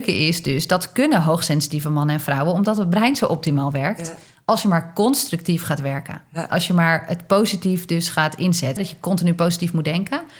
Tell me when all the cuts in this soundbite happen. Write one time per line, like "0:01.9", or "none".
0:08.8